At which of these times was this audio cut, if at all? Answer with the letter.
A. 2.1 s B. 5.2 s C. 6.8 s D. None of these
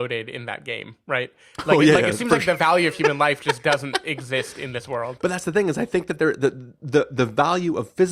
D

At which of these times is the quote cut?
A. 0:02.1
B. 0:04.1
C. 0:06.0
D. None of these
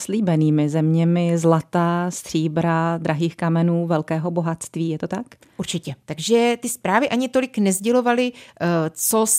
C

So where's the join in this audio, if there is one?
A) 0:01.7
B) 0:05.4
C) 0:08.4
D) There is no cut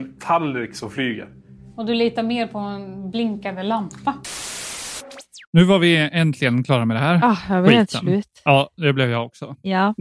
D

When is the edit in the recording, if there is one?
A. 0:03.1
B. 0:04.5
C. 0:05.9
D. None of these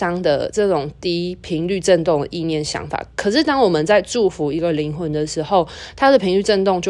D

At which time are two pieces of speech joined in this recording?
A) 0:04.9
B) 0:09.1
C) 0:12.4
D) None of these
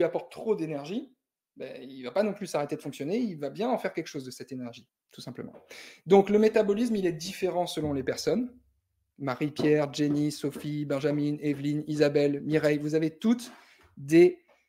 A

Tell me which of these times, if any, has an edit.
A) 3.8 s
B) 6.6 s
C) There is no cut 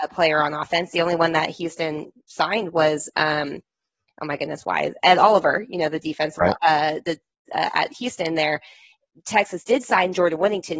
C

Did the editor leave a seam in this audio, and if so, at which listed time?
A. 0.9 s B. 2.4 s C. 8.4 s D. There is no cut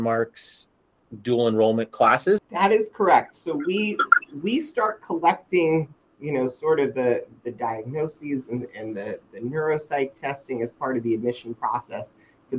B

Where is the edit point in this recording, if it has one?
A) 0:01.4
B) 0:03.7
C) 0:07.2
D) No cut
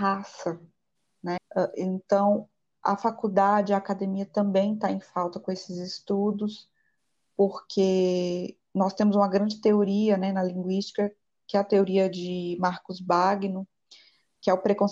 A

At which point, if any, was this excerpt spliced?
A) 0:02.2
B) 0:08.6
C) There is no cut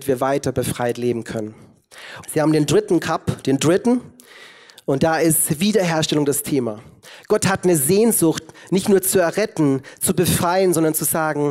A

